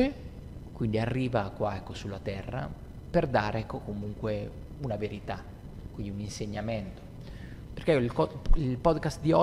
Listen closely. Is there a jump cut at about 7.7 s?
yes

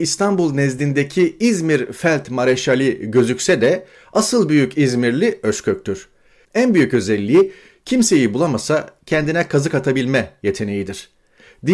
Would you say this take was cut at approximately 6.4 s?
yes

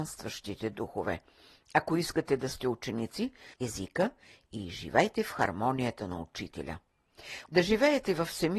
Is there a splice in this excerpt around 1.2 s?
no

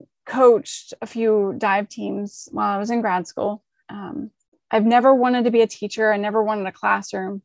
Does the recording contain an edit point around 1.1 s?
no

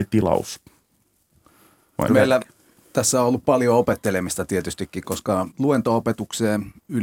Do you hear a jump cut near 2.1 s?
yes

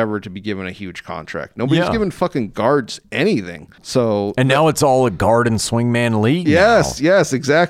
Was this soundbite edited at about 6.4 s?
no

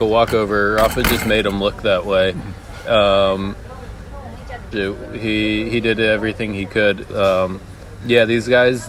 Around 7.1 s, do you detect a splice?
yes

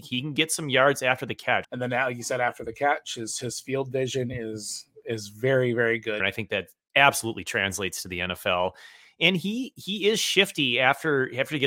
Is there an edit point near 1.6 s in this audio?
yes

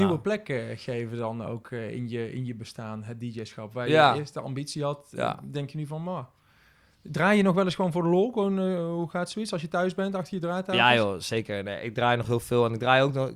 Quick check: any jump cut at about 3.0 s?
no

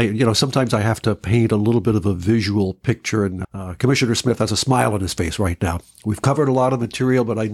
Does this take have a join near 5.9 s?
no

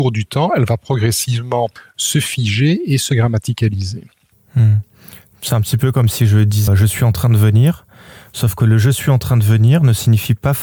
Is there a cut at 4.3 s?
no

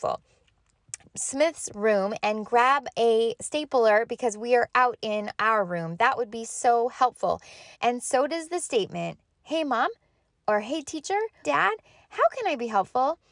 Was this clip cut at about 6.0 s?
no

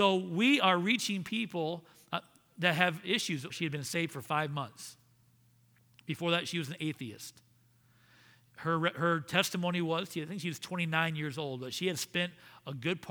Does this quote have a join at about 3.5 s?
yes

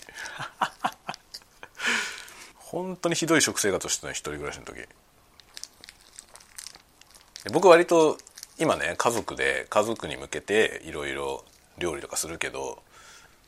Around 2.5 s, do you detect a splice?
yes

